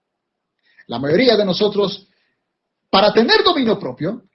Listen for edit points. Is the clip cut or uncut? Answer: uncut